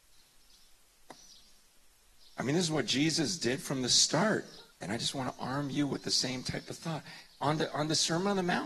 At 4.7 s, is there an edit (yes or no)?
yes